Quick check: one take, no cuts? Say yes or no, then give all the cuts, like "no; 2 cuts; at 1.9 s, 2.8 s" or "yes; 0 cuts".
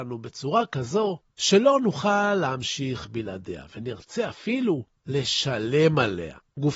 yes; 0 cuts